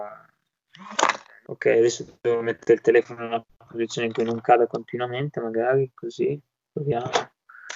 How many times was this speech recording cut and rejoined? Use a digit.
0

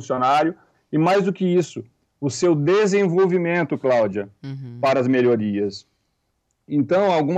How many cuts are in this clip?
0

